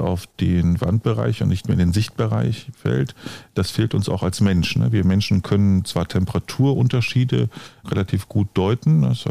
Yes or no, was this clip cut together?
yes